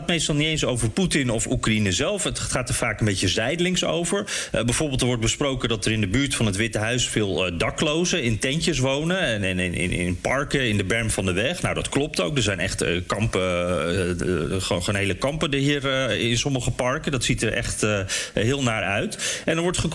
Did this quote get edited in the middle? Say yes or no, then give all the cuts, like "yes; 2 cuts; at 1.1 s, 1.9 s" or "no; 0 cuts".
no; 0 cuts